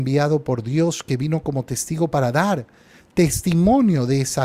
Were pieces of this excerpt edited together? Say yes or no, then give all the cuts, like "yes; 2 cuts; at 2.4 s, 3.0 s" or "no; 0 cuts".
no; 0 cuts